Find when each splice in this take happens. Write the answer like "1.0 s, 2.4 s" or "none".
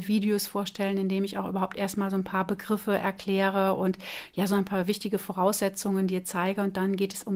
none